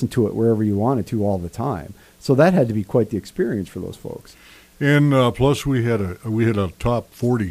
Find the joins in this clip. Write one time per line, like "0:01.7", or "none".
none